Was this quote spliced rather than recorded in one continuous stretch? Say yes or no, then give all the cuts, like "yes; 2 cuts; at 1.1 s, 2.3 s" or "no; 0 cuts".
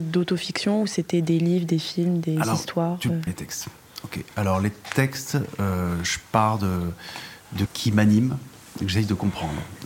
yes; 2 cuts; at 3.3 s, 7.7 s